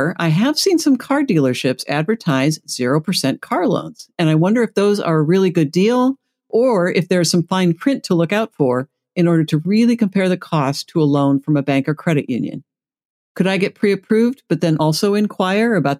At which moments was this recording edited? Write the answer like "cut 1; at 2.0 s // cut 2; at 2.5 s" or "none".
none